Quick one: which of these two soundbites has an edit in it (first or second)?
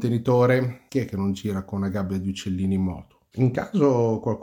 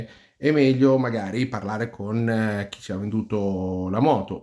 first